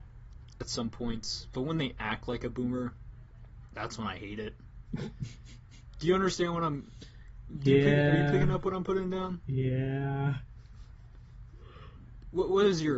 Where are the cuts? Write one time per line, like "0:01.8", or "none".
none